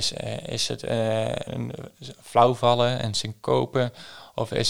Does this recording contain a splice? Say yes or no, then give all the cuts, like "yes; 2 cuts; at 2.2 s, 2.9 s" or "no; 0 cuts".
yes; 1 cut; at 1.5 s